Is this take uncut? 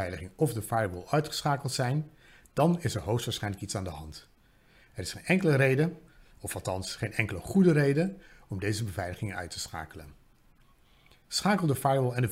yes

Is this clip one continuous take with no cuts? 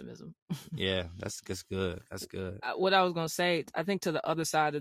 yes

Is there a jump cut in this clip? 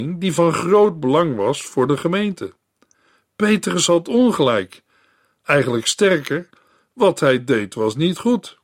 no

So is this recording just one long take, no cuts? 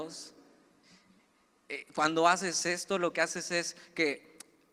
yes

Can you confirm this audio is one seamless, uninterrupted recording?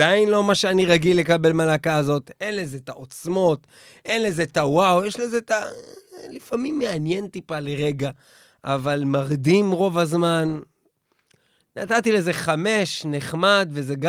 yes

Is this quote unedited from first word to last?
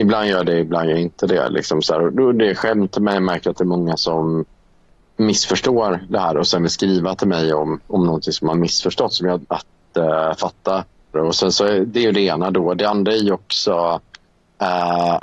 no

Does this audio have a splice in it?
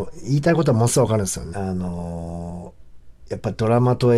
yes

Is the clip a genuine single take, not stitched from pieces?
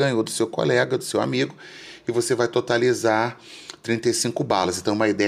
yes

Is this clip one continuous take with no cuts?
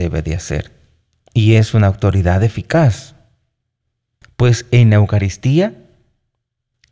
no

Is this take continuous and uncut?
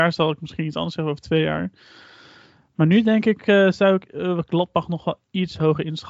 yes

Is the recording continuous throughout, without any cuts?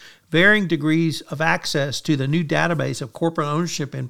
yes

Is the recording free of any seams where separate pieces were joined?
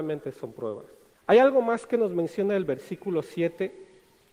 no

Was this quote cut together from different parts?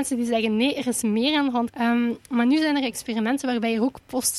yes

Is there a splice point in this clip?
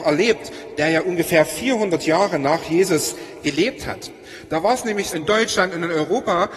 yes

